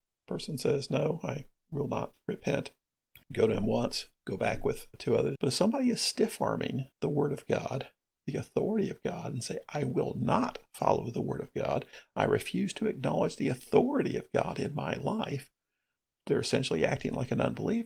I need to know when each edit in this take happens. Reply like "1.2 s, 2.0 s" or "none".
3.2 s, 5.3 s